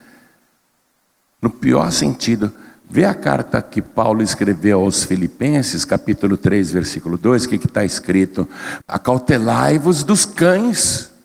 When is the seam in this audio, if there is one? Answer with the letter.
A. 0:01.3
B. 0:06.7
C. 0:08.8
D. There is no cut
C